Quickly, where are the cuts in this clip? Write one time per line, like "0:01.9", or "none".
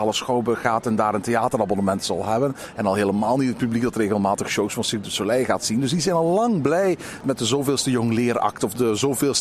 none